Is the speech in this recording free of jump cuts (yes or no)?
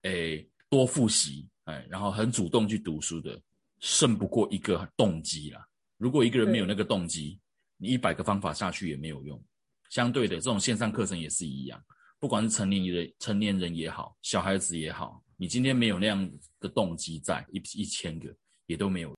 no